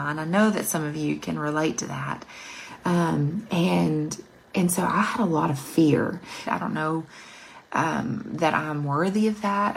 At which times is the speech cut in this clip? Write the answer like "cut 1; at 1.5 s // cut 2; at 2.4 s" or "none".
cut 1; at 6.5 s